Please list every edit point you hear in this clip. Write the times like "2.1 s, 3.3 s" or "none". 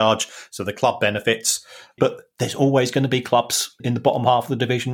2.0 s, 3.8 s